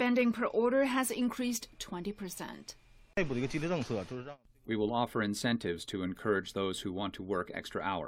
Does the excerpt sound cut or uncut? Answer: uncut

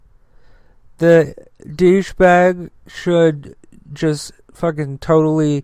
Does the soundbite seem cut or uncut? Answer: uncut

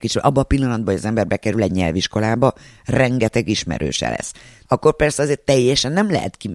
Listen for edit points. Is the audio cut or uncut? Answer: cut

